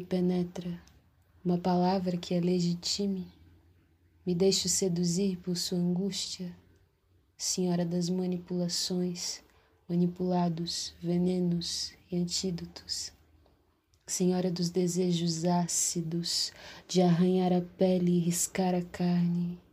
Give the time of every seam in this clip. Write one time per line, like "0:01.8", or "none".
none